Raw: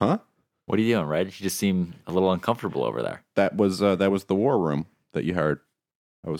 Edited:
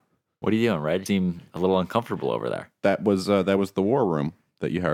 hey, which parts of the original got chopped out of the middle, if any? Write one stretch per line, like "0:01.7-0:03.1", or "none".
0:01.3-0:01.6